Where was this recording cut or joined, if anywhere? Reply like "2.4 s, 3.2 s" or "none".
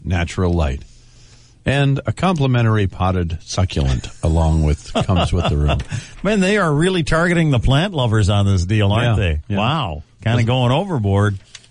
none